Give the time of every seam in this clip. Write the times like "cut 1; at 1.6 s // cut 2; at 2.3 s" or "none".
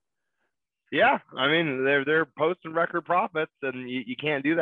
none